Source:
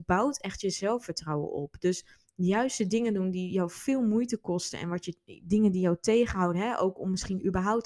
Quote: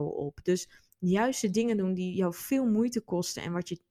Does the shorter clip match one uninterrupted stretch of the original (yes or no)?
yes